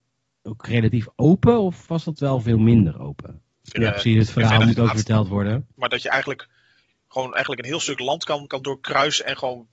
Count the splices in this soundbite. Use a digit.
3